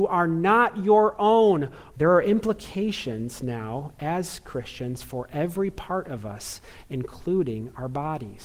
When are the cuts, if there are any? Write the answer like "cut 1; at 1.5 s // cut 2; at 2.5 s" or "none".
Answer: cut 1; at 1.9 s